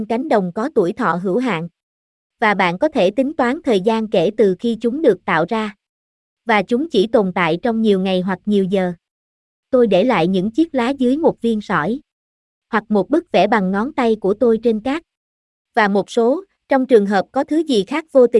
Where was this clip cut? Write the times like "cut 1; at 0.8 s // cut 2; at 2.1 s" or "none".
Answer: cut 1; at 16.6 s